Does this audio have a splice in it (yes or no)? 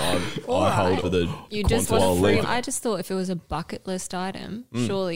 yes